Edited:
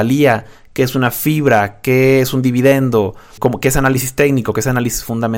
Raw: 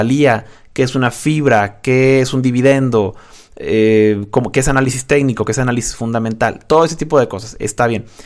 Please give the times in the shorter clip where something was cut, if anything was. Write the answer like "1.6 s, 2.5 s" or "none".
3.4 s